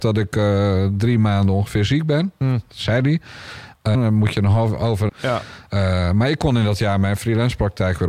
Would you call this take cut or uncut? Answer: cut